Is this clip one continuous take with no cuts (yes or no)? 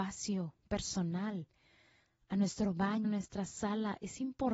no